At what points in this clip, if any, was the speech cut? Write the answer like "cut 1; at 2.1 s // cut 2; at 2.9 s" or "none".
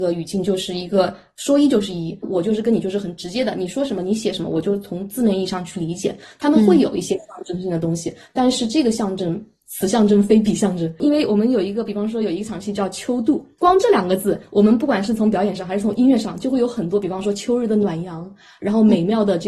cut 1; at 2.2 s